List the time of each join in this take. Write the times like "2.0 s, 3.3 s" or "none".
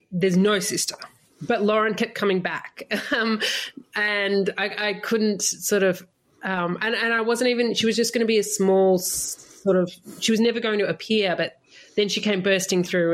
none